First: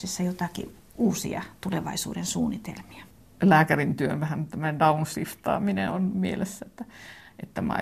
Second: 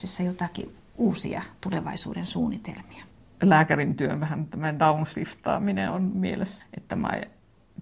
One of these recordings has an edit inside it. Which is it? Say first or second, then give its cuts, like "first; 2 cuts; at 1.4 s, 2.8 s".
second; 1 cut; at 6.6 s